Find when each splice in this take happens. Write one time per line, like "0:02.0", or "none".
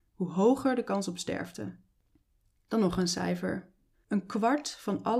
0:03.9